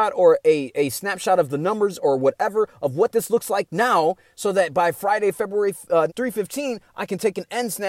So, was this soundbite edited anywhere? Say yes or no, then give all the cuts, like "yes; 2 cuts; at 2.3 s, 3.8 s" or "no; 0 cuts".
yes; 1 cut; at 6.1 s